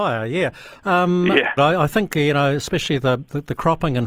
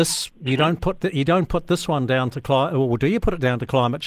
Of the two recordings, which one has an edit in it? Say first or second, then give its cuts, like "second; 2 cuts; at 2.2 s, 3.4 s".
first; 1 cut; at 1.6 s